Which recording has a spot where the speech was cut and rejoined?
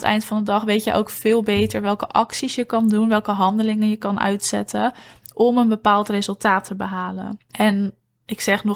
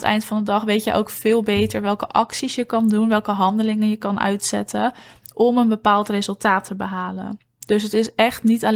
first; 1 cut; at 7.5 s

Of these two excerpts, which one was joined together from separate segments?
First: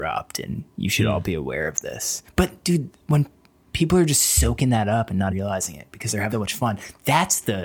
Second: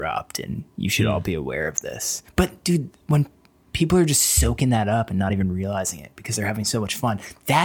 first; 2 cuts; at 5.3 s, 6.3 s

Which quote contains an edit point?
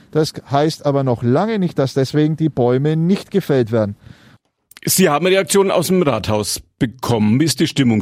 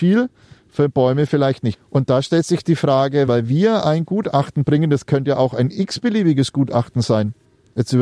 second; 2 cuts; at 1.7 s, 3.3 s

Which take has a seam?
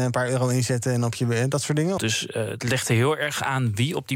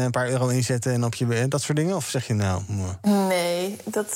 first; 1 cut; at 2.0 s

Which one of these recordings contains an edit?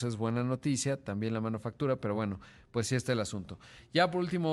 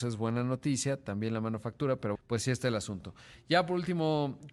second; 1 cut; at 2.1 s

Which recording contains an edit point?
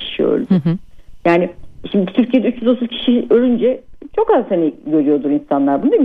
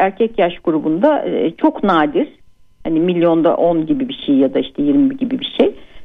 first; 1 cut; at 1.2 s

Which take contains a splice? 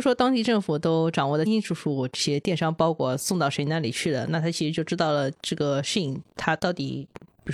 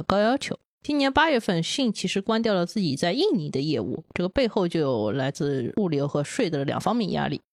first; 1 cut; at 1.5 s

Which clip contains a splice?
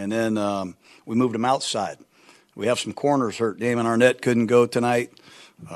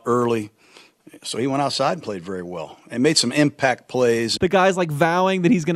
second; 1 cut; at 4.4 s

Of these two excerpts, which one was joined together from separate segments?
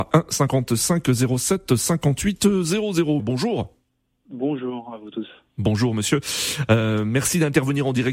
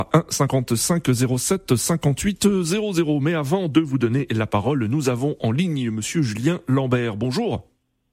first; 1 cut; at 3.2 s

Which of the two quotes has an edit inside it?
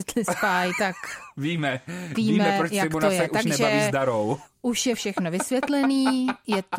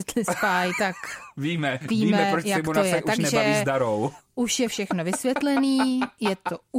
second; 1 cut; at 1.8 s

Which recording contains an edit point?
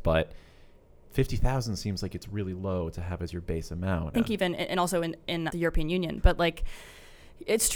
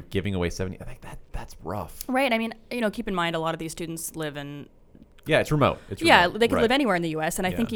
first; 2 cuts; at 4.1 s, 5.5 s

